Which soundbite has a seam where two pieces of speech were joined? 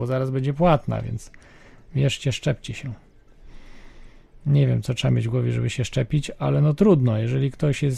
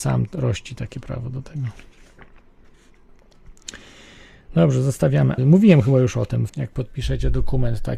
second; 2 cuts; at 5.4 s, 6.5 s

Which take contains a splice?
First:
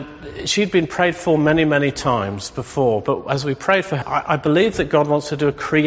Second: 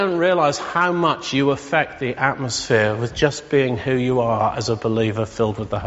first; 1 cut; at 4.0 s

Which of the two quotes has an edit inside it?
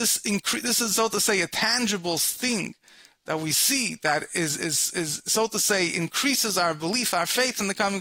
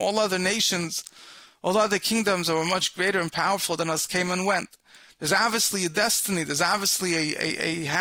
first; 1 cut; at 4.6 s

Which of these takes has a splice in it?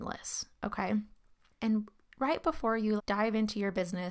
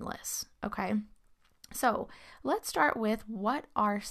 first; 2 cuts; at 1.5 s, 3.0 s

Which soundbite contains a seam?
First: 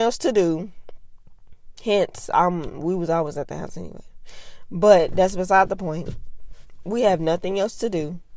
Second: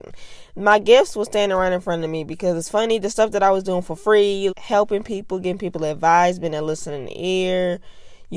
second; 1 cut; at 4.5 s

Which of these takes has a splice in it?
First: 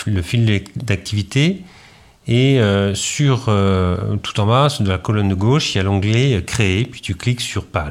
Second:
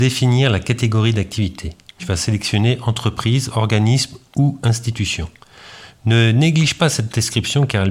second; 2 cuts; at 2.0 s, 5.9 s

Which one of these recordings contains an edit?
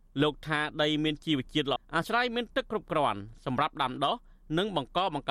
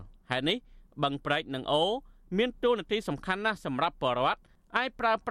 first; 1 cut; at 1.8 s

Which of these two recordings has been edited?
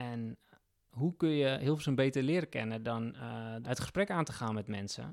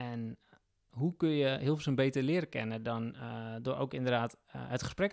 first; 1 cut; at 3.6 s

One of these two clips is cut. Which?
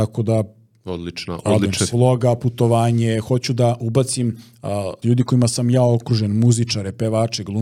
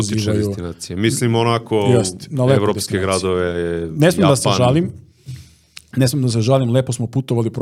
first; 2 cuts; at 1.9 s, 5.0 s

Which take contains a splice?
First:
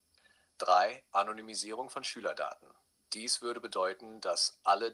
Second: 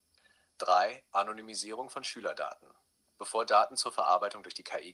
first; 1 cut; at 3.1 s

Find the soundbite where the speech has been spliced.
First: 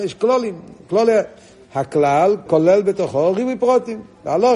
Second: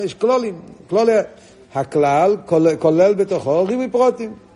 first; 1 cut; at 2.5 s

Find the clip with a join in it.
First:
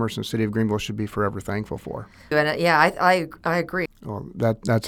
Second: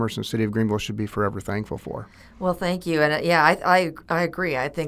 first; 2 cuts; at 2.3 s, 3.9 s

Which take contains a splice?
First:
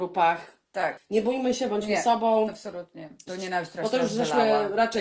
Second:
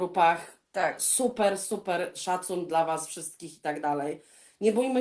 first; 2 cuts; at 1.0 s, 3.3 s

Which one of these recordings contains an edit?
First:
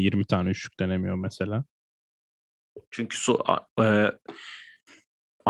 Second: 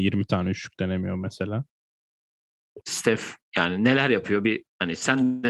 second; 1 cut; at 2.8 s

